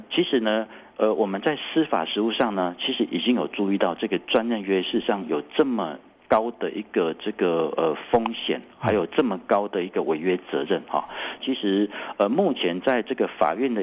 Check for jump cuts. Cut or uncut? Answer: cut